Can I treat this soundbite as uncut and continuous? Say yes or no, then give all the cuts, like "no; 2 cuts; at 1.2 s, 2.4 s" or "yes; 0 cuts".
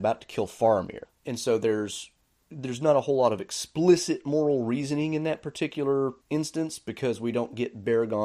no; 2 cuts; at 1.0 s, 6.2 s